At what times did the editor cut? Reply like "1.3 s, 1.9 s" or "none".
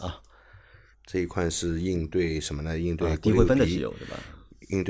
0.9 s